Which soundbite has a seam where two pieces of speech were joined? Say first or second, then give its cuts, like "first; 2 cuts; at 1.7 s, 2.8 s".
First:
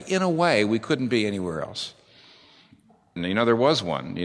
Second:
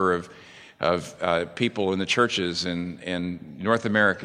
first; 1 cut; at 3.2 s